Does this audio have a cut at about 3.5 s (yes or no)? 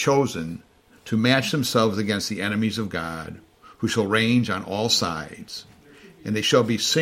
no